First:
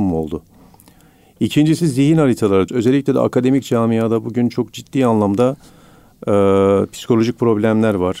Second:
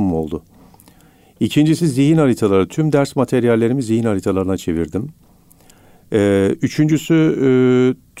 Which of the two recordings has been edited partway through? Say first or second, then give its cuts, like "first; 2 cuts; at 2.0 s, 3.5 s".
first; 1 cut; at 2.7 s